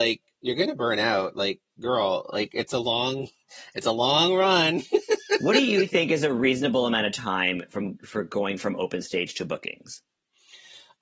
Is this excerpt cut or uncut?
uncut